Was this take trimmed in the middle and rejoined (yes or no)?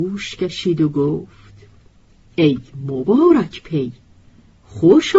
no